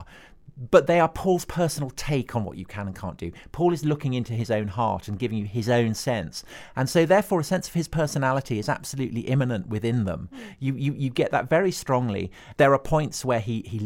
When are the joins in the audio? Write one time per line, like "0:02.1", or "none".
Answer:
none

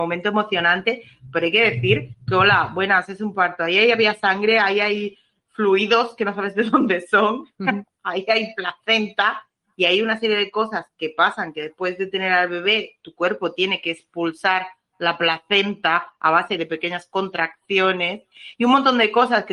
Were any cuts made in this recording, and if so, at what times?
none

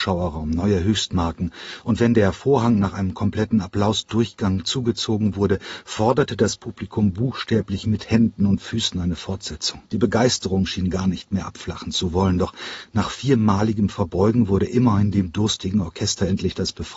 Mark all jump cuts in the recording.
0:09.9

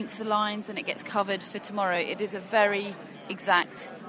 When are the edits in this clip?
none

